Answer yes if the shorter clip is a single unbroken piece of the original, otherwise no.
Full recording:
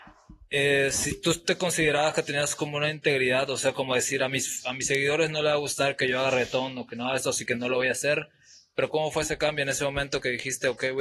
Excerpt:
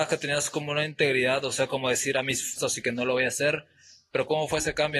no